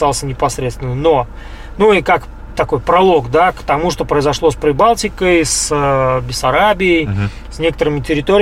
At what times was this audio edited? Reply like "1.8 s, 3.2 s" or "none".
none